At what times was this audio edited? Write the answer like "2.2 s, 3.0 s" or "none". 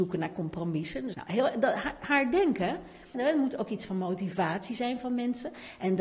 1.1 s, 3.1 s